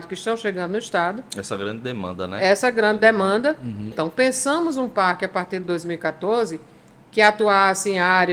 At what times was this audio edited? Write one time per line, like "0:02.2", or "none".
0:03.9

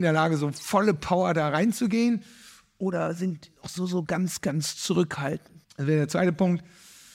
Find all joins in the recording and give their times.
0:05.6

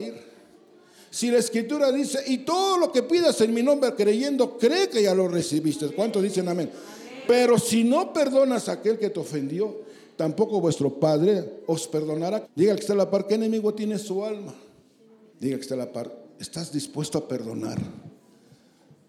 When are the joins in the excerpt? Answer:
0:12.4
0:15.3

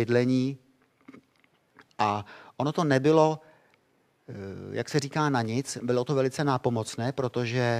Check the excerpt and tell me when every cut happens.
none

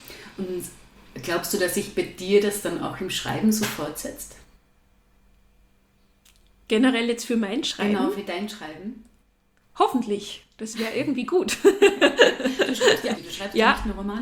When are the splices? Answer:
0:13.1

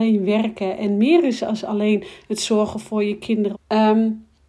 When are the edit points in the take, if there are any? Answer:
0:03.5

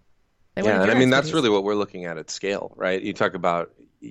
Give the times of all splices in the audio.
none

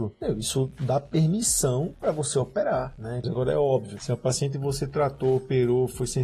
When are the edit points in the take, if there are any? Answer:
0:03.2

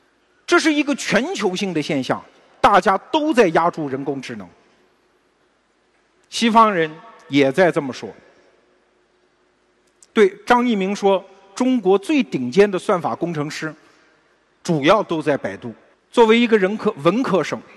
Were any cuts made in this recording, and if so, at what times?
0:10.0
0:15.9

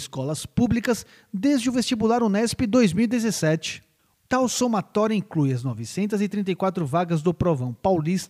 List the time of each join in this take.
0:04.1

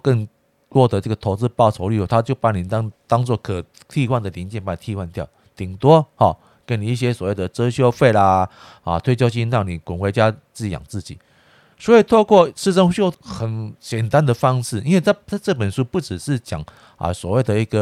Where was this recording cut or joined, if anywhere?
0:11.7
0:13.1

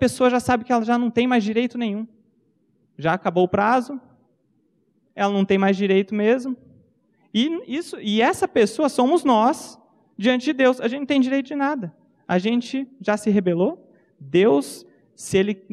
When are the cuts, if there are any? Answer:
none

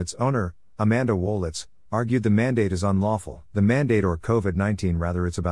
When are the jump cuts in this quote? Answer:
0:03.5

